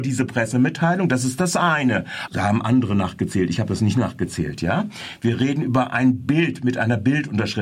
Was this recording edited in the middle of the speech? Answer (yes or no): yes